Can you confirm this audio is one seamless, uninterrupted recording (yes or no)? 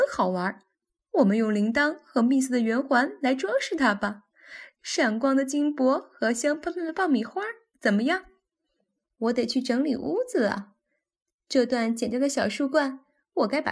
no